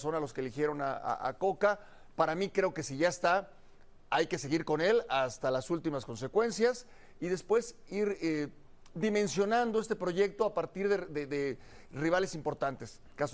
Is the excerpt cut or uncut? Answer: uncut